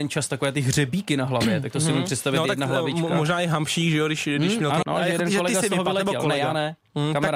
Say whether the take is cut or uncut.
cut